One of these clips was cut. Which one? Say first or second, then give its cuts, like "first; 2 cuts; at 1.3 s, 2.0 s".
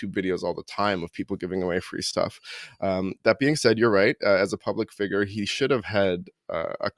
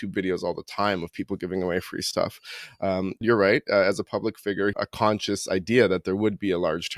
second; 2 cuts; at 3.2 s, 4.7 s